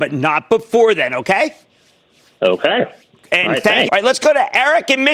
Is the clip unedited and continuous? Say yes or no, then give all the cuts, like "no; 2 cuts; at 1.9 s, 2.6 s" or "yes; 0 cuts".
no; 1 cut; at 3.9 s